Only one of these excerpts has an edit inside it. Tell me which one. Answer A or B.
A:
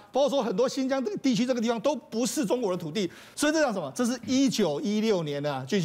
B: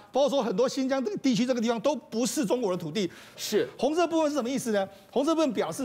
B